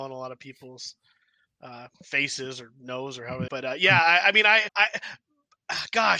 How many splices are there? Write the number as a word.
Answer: three